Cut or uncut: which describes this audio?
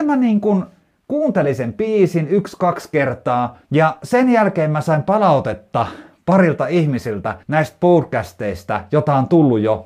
cut